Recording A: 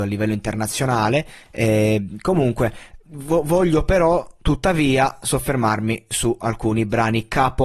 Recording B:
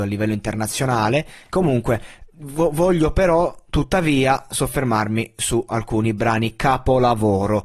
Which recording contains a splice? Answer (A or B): B